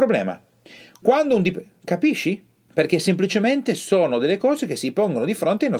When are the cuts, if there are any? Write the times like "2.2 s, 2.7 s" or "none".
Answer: 2.7 s